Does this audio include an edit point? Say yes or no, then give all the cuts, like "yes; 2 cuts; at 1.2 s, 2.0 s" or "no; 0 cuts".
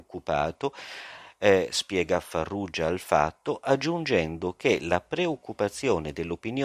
no; 0 cuts